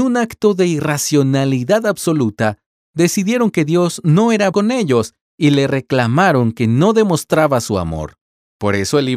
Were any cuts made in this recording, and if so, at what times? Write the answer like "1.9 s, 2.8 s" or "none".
4.5 s